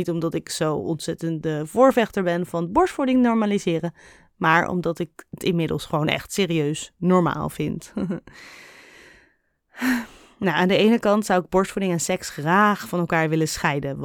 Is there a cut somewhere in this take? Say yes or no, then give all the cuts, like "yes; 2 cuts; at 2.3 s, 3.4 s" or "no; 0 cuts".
no; 0 cuts